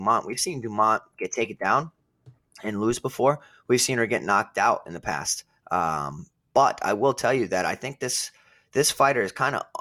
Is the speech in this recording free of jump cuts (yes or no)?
yes